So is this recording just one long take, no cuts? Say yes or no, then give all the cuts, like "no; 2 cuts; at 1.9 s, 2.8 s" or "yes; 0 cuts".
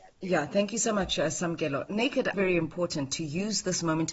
no; 1 cut; at 2.3 s